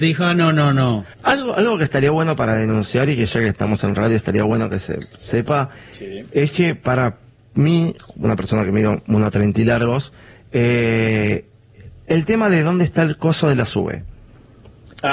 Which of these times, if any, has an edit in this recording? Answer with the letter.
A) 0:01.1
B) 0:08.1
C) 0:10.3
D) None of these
A